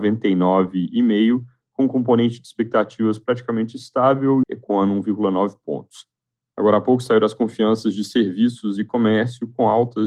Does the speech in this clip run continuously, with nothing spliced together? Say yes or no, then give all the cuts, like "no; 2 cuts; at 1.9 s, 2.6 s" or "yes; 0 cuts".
no; 1 cut; at 4.4 s